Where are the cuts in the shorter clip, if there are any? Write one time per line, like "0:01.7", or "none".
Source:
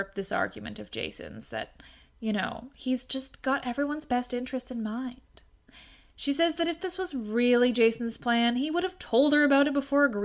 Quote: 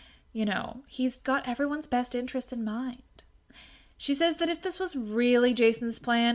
0:01.2